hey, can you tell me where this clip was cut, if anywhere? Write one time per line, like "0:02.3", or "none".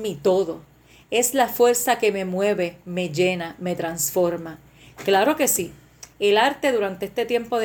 none